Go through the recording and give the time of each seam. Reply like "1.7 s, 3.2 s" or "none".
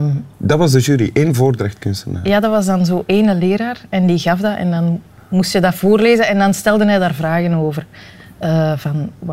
none